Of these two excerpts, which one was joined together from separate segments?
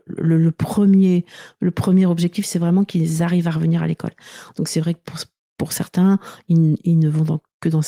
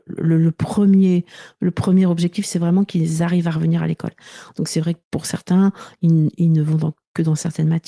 second; 1 cut; at 5.0 s

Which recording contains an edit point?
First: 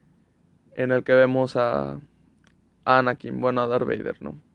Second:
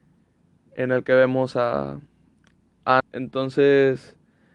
second; 1 cut; at 3.0 s

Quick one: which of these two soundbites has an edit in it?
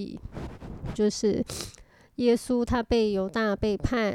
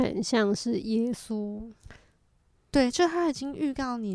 first; 1 cut; at 0.9 s

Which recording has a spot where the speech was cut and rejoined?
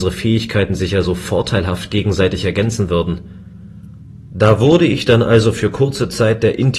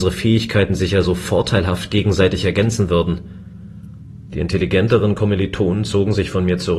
second; 1 cut; at 4.3 s

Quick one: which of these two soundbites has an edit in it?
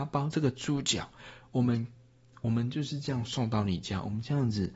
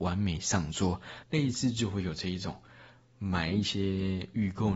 second; 1 cut; at 1.2 s

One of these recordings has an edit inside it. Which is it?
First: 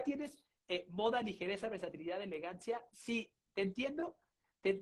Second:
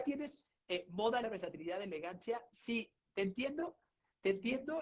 second; 1 cut; at 1.2 s

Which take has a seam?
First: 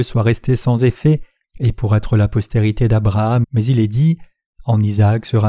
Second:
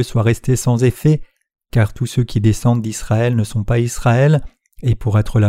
first; 2 cuts; at 1.4 s, 3.4 s

